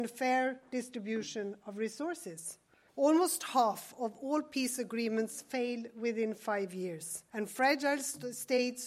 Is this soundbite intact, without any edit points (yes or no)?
no